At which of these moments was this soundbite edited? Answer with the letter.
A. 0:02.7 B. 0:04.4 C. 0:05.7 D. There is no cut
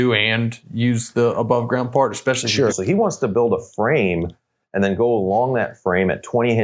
A